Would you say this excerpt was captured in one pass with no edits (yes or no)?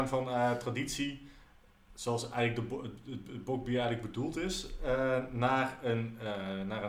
yes